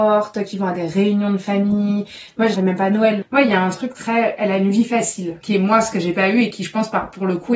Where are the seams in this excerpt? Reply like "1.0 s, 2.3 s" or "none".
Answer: 2.5 s, 5.4 s